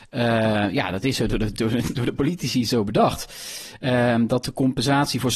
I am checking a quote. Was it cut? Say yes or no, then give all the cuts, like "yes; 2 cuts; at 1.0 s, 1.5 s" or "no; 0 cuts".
no; 0 cuts